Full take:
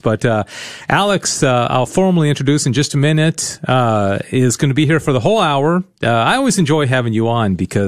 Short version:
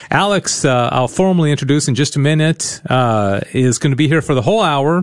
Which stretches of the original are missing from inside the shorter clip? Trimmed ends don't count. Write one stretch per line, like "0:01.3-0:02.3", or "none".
none